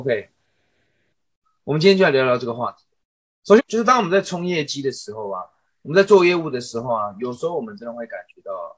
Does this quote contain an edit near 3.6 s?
yes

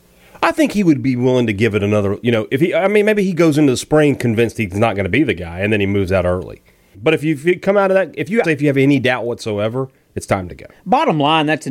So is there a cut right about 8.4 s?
yes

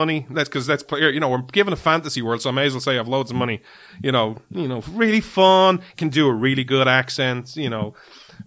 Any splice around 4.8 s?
no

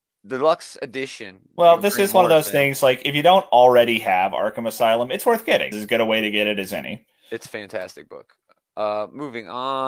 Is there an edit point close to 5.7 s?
yes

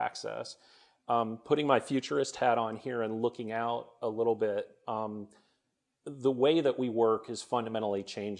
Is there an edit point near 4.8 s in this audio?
no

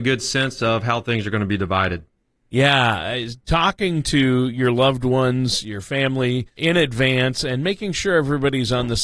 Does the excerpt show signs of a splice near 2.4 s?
no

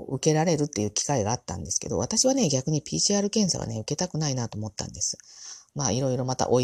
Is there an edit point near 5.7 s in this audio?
yes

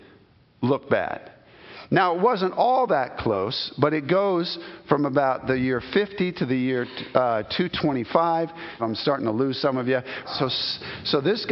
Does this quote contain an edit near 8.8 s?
yes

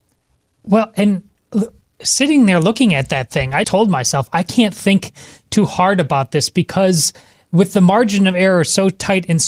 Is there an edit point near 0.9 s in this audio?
no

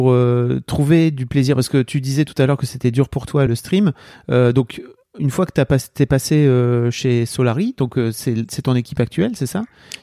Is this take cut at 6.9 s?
no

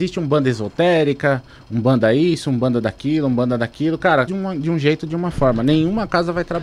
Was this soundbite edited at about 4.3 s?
yes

